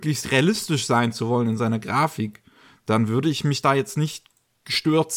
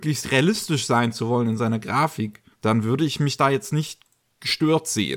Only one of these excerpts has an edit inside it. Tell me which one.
second; 1 cut; at 2.5 s

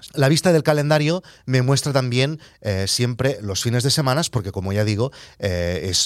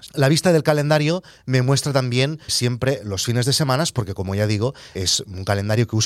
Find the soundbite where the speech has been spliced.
second; 2 cuts; at 2.5 s, 5.0 s

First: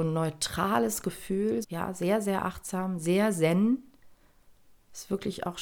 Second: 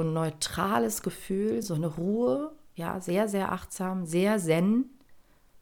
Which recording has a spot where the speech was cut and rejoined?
first; 1 cut; at 1.6 s

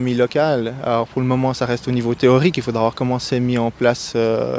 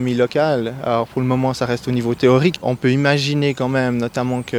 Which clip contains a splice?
second; 1 cut; at 2.6 s

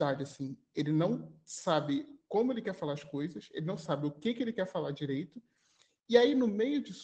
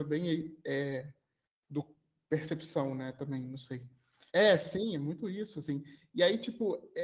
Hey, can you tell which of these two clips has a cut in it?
second; 1 cut; at 4.3 s

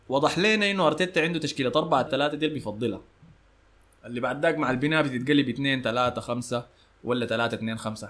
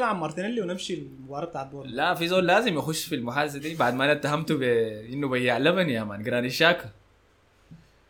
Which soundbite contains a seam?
first; 1 cut; at 2.1 s

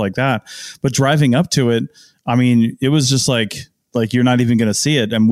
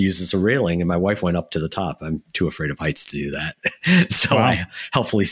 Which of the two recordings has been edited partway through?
first; 1 cut; at 3.9 s

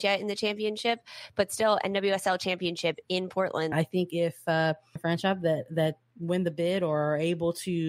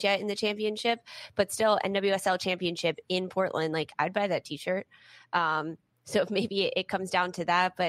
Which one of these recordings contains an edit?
first; 2 cuts; at 3.7 s, 5.0 s

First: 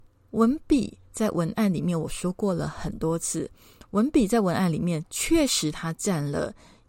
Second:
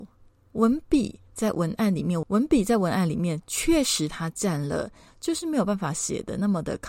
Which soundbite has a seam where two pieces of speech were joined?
second; 2 cuts; at 2.2 s, 5.1 s

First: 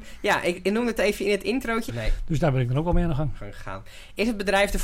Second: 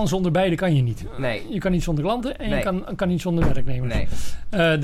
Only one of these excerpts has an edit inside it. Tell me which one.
first; 1 cut; at 1.9 s

